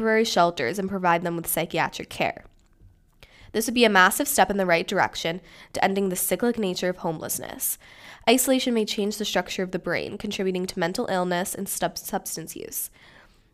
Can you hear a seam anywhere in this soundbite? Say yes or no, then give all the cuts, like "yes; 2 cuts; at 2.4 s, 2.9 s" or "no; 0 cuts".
no; 0 cuts